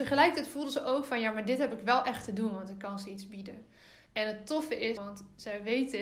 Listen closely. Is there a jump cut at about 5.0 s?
yes; 1 cut; at 5.0 s

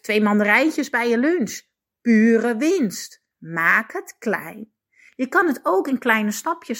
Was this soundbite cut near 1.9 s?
no; 2 cuts; at 3.3 s, 5.1 s

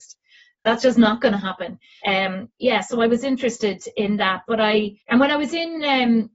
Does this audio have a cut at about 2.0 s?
yes; 2 cuts; at 2.0 s, 5.0 s

